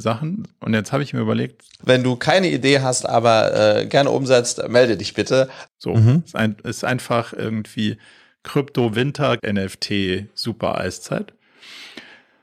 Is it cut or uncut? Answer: cut